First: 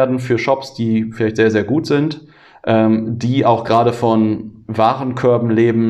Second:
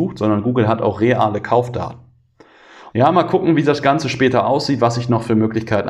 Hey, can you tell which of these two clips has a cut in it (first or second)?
second